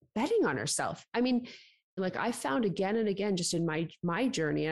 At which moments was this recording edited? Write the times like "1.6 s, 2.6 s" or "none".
2.0 s